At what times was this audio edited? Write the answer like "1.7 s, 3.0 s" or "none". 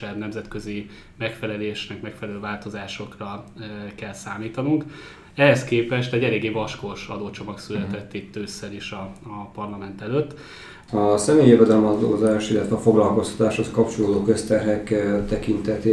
none